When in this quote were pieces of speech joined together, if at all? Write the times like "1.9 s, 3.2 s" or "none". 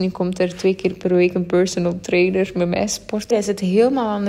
3.3 s